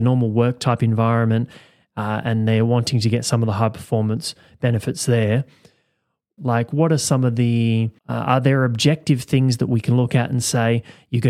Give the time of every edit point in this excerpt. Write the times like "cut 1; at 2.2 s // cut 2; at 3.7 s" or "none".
cut 1; at 6.4 s // cut 2; at 8.0 s